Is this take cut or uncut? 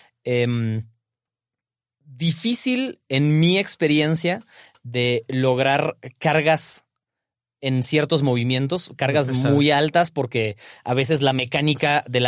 uncut